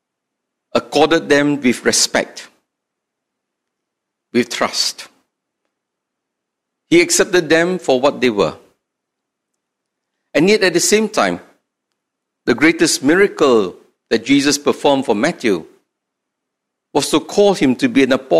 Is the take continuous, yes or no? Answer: yes